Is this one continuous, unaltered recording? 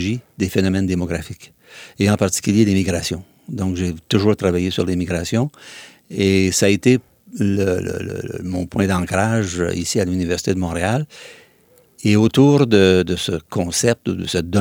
yes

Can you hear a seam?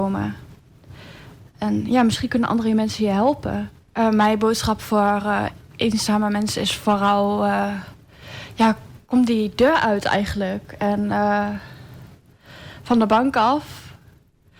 yes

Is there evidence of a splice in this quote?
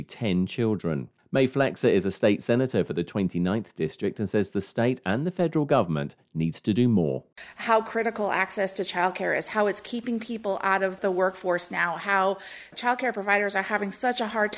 no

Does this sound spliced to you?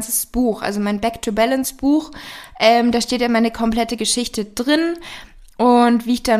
no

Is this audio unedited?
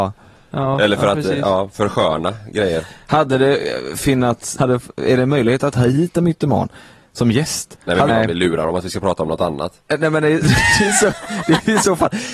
no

